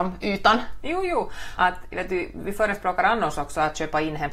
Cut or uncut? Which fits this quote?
cut